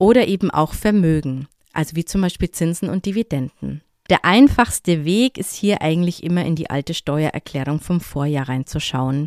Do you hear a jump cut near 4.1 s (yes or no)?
yes